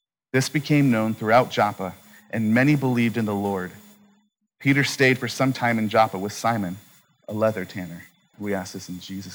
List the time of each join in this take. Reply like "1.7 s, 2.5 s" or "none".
8.3 s